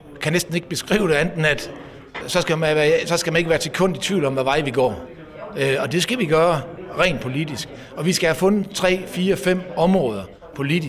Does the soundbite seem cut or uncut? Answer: cut